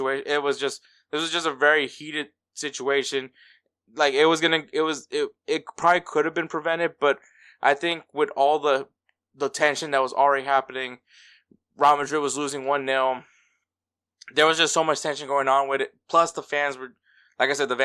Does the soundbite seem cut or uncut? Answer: uncut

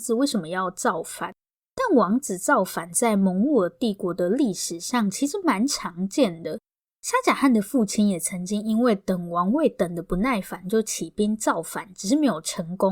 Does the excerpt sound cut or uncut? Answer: uncut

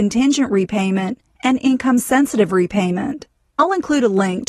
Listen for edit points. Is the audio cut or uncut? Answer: uncut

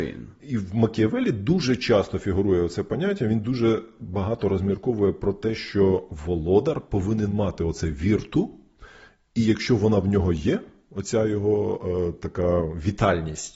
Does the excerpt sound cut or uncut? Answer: uncut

